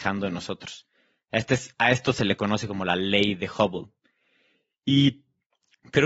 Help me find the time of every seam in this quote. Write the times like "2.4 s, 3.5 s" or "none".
none